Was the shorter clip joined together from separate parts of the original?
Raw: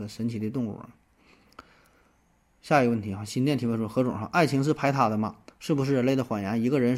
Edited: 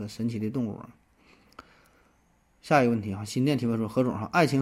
no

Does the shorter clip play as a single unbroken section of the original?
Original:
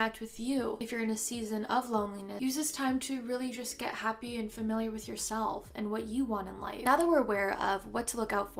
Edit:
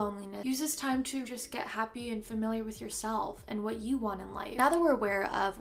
no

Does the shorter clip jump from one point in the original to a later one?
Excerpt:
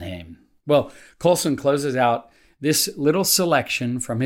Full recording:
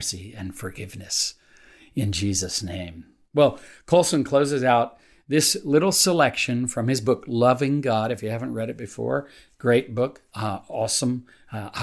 no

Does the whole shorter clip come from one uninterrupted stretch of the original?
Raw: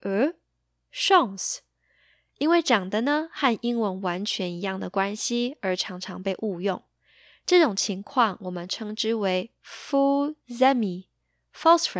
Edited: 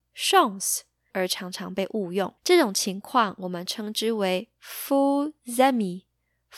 no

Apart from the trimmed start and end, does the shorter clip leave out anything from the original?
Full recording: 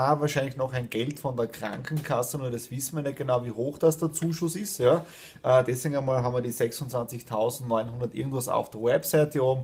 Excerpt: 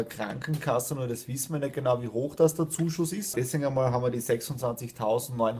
yes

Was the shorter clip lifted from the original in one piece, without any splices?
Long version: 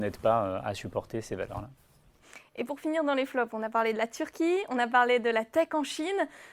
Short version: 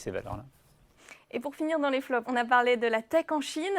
no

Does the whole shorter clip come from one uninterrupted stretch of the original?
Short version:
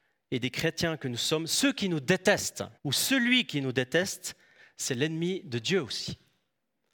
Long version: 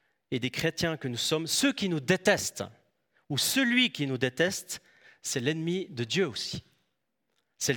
no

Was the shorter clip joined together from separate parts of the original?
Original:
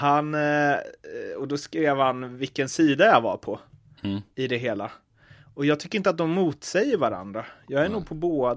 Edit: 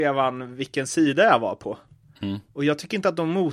yes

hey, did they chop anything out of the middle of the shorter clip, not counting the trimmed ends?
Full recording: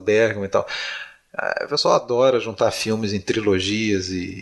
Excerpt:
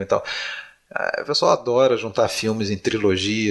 no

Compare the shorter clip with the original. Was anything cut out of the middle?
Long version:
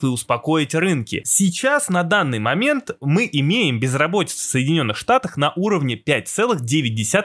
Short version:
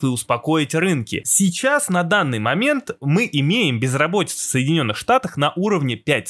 no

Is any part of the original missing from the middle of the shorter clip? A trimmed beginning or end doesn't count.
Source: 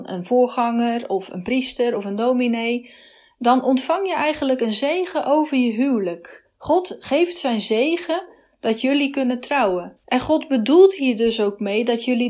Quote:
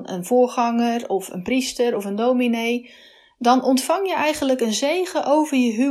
no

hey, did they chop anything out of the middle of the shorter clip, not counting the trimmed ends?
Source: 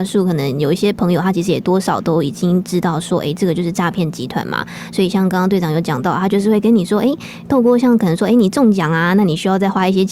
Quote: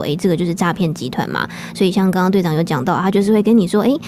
no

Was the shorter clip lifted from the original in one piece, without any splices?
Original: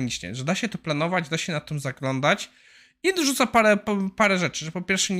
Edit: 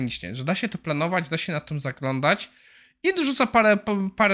yes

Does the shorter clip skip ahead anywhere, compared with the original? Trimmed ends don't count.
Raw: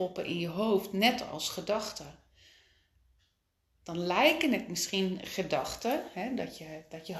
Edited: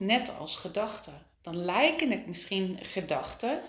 yes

